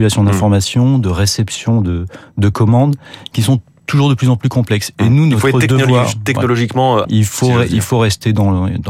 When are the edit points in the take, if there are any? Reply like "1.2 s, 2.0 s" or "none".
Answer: 7.0 s